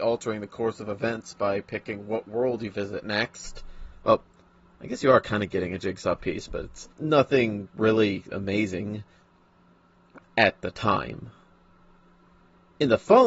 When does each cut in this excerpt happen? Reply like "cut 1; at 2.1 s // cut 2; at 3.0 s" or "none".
cut 1; at 6.9 s // cut 2; at 10.2 s